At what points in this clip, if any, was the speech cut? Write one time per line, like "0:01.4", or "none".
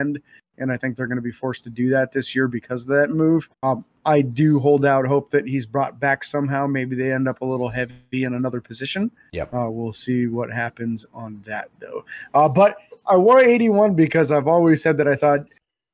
0:03.5